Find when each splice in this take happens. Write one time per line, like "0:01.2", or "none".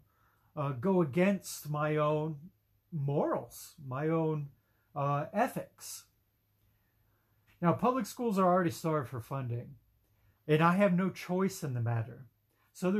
0:07.5
0:10.3